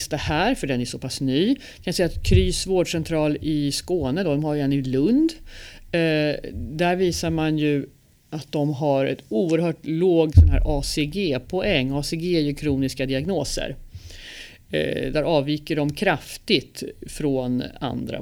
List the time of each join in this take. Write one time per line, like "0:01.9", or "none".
none